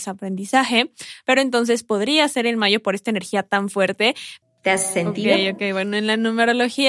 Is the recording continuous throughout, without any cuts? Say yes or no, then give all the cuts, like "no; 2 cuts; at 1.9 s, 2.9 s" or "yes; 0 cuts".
no; 1 cut; at 4.4 s